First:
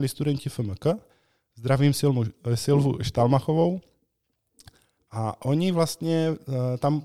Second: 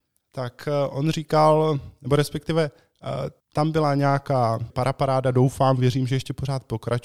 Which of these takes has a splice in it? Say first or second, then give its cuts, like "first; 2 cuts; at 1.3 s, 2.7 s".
second; 2 cuts; at 3.4 s, 4.7 s